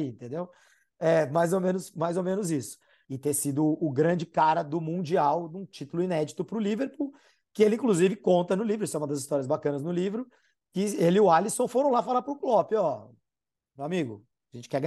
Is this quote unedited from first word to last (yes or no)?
no